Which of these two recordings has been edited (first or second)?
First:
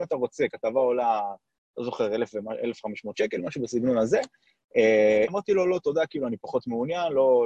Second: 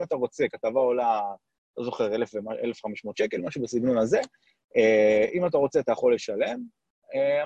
first